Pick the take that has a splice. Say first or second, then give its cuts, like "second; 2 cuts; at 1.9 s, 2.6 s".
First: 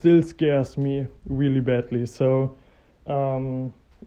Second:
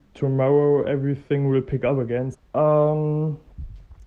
second; 1 cut; at 2.3 s